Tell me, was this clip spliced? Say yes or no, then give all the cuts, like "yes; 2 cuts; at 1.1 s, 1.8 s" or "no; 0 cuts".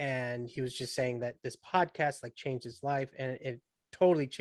no; 0 cuts